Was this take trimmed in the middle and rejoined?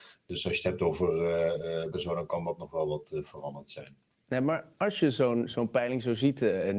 yes; 1 cut; at 1.9 s

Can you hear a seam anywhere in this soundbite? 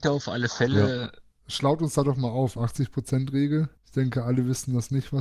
yes; 1 cut; at 3.8 s

